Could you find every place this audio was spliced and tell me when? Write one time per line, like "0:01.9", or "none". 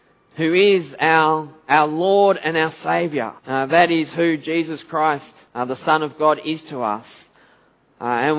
0:03.4
0:05.5